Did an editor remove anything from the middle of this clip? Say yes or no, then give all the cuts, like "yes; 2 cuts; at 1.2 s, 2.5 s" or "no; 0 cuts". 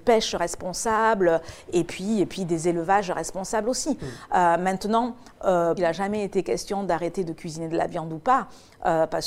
yes; 1 cut; at 5.8 s